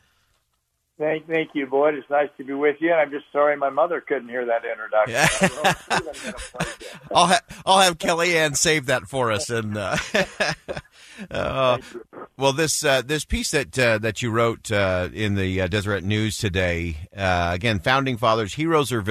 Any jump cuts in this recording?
no; 0 cuts

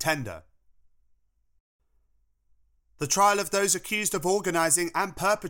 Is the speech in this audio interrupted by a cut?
no; 0 cuts

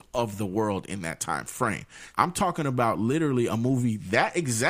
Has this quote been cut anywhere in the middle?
yes; 1 cut; at 2.1 s

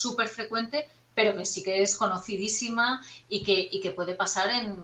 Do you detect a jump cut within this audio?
no; 0 cuts

